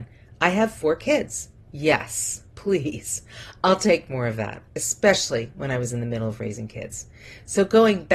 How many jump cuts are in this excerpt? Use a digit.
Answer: 1